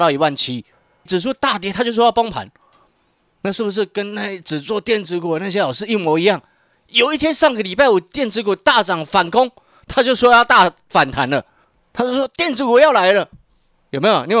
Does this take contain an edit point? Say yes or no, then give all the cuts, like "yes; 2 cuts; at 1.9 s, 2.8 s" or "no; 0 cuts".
yes; 1 cut; at 1.1 s